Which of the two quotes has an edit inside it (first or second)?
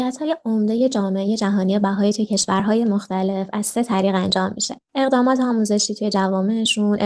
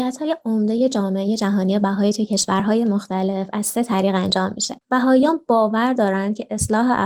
second